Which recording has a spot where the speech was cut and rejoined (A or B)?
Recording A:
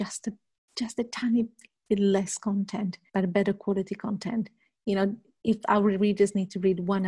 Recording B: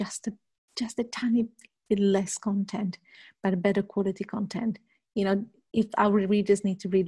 A